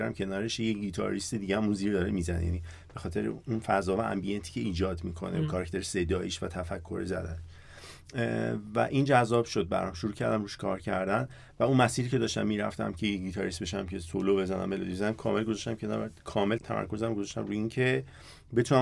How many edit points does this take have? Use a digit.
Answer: 1